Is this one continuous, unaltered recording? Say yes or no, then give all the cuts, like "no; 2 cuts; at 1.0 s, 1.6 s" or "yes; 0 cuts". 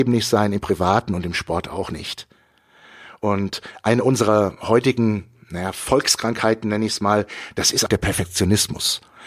no; 1 cut; at 7.9 s